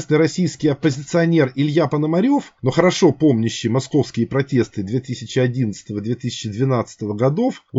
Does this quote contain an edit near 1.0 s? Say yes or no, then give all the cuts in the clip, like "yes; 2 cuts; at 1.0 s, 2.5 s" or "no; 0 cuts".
no; 1 cut; at 2.6 s